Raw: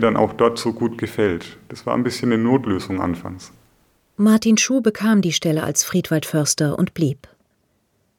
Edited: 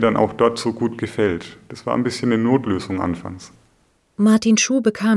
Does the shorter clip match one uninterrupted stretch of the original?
yes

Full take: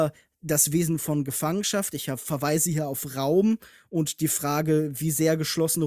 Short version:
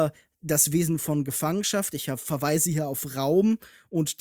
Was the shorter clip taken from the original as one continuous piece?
yes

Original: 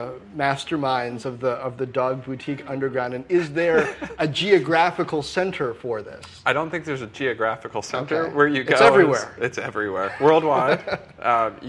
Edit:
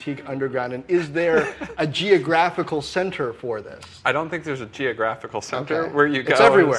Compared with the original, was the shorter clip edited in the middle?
no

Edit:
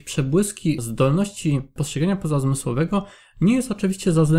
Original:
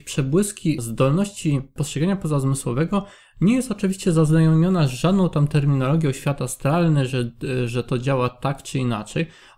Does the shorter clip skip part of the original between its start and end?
no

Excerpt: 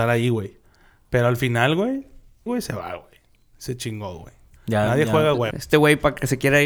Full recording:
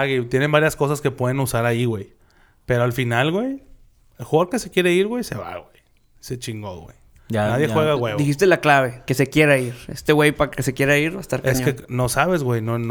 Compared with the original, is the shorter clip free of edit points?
no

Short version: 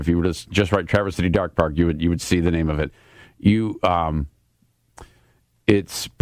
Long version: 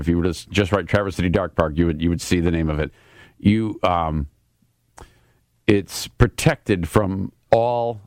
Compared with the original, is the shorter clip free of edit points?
yes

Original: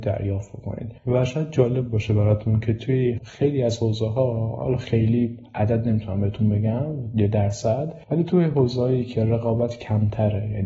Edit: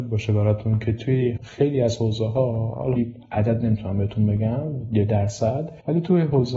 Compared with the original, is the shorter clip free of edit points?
no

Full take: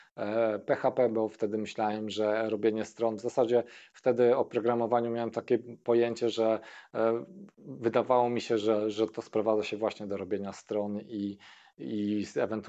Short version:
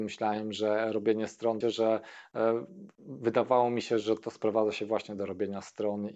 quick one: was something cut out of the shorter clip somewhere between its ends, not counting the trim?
yes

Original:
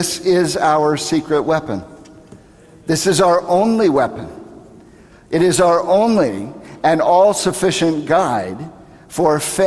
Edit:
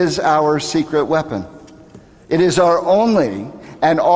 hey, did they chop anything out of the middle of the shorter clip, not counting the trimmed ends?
yes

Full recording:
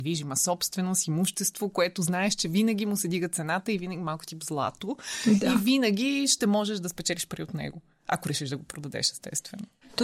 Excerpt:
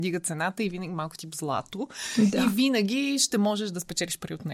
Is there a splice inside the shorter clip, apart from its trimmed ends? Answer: no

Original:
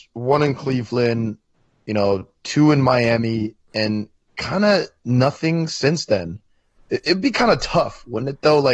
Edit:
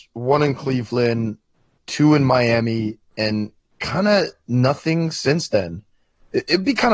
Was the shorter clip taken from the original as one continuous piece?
no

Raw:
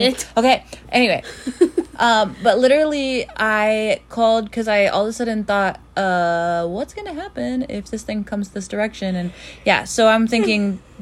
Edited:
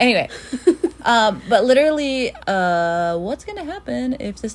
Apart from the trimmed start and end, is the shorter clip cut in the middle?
yes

